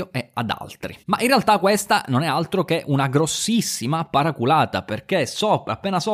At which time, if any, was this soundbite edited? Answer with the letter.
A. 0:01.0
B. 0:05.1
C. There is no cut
A